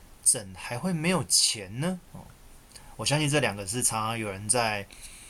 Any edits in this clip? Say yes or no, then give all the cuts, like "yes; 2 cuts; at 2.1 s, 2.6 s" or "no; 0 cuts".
yes; 1 cut; at 2.1 s